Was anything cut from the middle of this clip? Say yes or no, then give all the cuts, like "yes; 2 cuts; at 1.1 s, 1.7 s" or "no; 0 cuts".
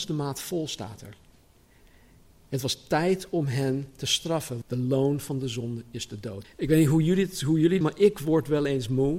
yes; 3 cuts; at 4.6 s, 6.4 s, 7.8 s